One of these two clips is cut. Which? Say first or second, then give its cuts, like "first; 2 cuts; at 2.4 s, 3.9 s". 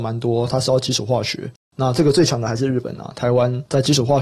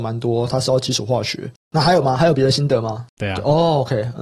second; 2 cuts; at 1.6 s, 3.1 s